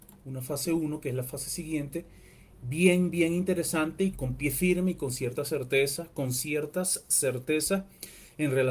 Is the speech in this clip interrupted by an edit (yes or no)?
yes